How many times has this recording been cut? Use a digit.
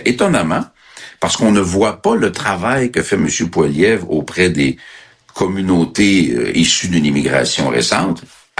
0